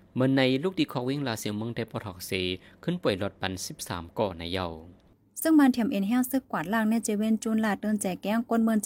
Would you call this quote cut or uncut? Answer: uncut